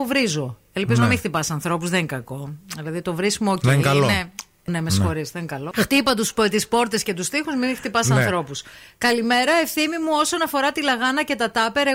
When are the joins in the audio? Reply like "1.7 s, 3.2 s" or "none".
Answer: 4.7 s, 5.7 s